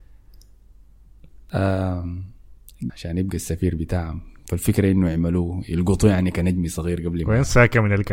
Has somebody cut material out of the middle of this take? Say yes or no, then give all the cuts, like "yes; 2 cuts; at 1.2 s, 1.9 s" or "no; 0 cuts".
yes; 1 cut; at 2.9 s